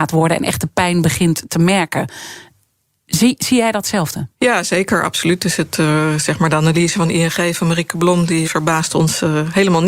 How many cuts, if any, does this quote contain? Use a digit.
2